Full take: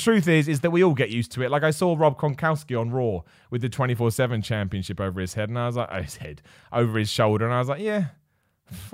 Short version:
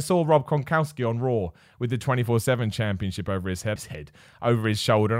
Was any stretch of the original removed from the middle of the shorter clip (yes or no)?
yes